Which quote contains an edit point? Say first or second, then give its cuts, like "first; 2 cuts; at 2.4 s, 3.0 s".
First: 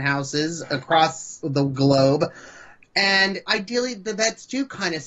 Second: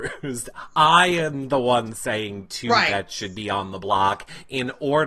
first; 2 cuts; at 1.4 s, 3.5 s